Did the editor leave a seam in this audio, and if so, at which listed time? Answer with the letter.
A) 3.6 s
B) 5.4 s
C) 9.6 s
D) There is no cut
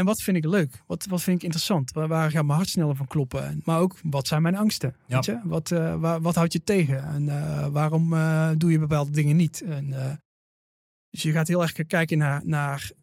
A